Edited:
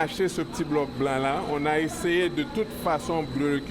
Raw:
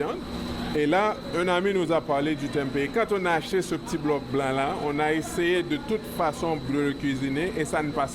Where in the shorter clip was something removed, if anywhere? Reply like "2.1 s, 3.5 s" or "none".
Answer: none